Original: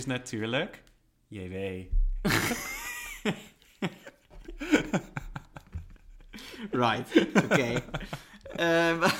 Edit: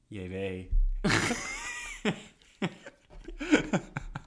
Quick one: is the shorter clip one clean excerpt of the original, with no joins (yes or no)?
yes